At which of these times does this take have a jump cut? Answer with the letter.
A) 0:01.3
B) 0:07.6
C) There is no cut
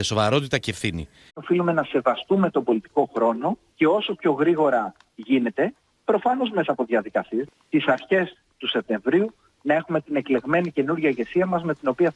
A